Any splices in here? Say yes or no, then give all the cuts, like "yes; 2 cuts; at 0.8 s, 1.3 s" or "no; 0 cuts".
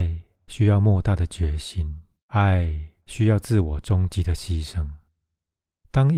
yes; 1 cut; at 2.2 s